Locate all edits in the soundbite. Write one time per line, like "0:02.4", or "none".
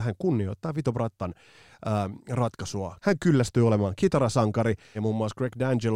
0:03.0
0:04.9